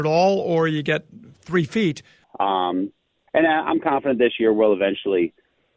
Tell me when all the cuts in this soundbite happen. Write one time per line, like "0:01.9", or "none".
0:02.2